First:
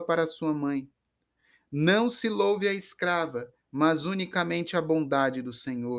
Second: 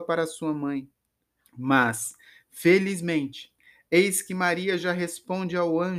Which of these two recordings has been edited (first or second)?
second